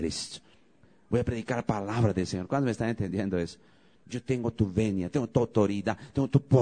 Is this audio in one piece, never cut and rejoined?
no; 1 cut; at 4.0 s

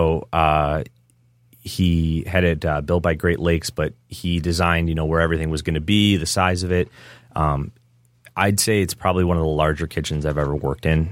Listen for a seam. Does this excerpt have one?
no; 0 cuts

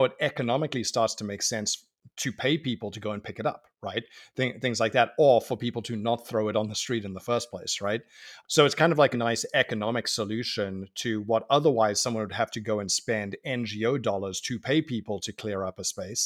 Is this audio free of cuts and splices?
no; 1 cut; at 9.1 s

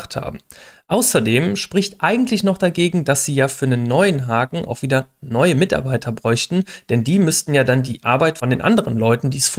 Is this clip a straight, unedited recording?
yes; 0 cuts

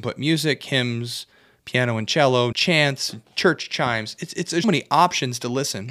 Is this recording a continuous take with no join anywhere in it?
no; 2 cuts; at 2.5 s, 4.6 s

